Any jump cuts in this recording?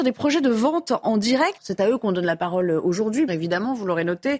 yes; 2 cuts; at 1.6 s, 3.3 s

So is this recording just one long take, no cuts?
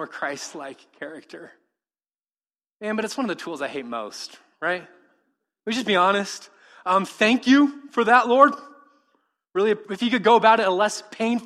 yes; 0 cuts

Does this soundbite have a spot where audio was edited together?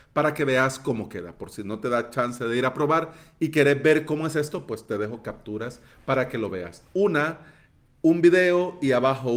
no; 0 cuts

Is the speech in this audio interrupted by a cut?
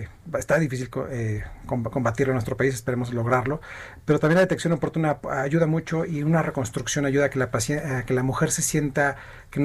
no; 0 cuts

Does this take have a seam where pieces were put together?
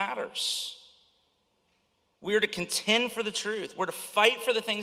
no; 0 cuts

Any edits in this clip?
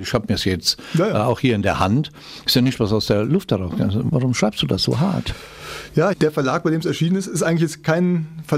yes; 2 cuts; at 4.1 s, 6.1 s

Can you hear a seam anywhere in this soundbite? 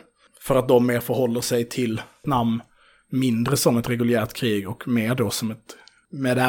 no; 0 cuts

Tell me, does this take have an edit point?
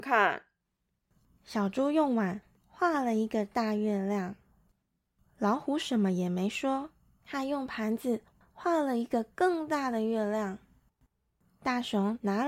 no; 0 cuts

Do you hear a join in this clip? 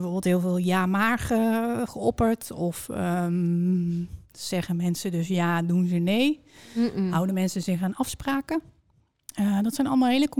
no; 0 cuts

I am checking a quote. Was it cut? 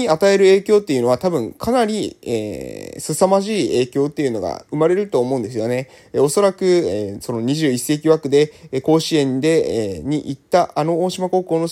no; 0 cuts

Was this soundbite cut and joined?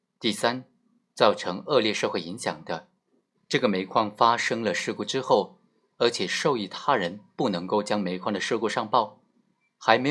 yes; 2 cuts; at 3.4 s, 5.9 s

